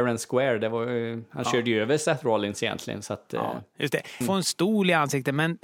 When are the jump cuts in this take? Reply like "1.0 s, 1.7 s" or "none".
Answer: 4.2 s